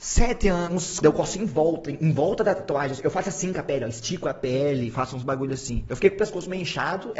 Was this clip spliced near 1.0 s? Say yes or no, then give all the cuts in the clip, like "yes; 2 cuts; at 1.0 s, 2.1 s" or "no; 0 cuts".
yes; 2 cuts; at 1.0 s, 5.9 s